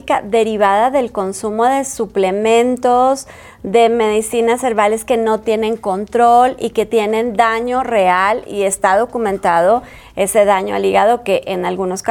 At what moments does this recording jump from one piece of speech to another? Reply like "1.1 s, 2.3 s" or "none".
none